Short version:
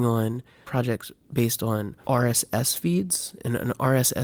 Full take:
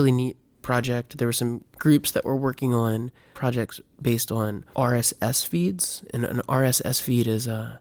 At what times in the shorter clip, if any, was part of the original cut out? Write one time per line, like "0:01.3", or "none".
none